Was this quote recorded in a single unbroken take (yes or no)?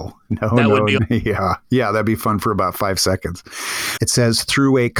no